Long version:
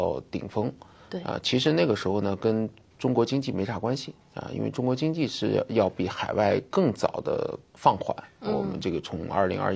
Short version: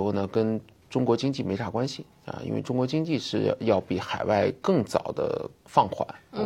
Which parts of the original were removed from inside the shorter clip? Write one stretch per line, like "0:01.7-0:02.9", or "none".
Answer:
none